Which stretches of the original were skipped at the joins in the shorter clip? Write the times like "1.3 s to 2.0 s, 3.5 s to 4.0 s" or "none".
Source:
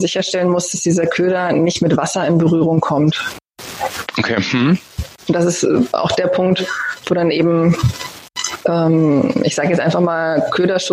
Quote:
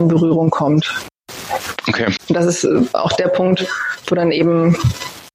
4.5 s to 5.2 s